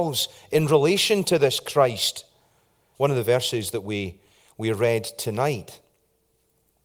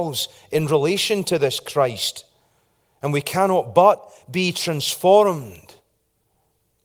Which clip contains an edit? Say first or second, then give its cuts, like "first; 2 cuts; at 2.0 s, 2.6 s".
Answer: first; 1 cut; at 2.9 s